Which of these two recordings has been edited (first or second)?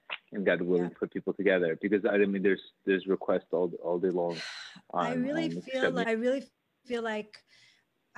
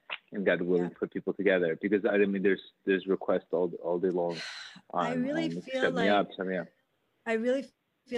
first